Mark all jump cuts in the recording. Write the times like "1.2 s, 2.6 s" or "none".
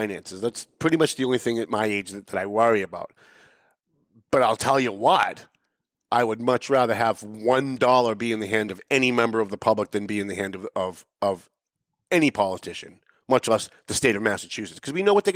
none